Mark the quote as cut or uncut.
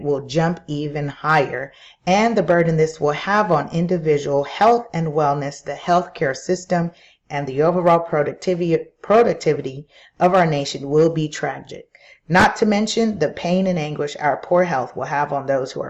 uncut